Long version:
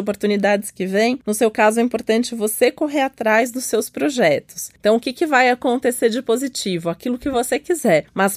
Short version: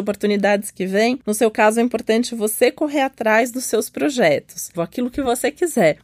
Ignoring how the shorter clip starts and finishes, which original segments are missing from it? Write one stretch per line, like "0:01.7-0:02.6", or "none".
0:04.7-0:06.8